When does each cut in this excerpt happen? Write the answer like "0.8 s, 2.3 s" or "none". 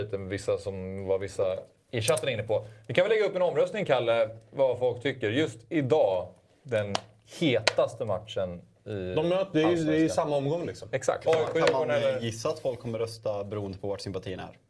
11.2 s